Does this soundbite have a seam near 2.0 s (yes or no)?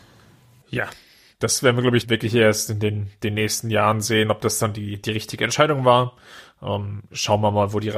yes